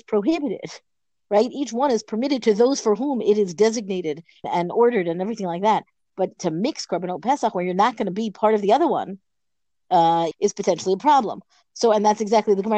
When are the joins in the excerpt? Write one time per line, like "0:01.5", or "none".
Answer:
0:04.4
0:10.3